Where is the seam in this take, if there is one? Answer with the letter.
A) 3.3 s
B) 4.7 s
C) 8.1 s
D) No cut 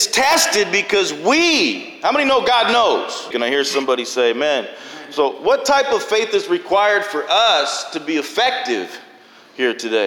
A